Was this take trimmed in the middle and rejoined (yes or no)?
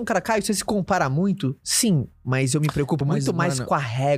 no